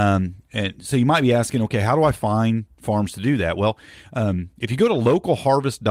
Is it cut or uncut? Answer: uncut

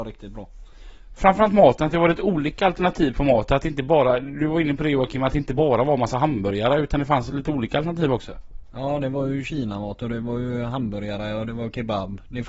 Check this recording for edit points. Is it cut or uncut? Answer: cut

